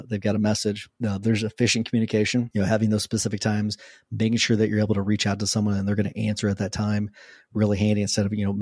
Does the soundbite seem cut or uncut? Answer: uncut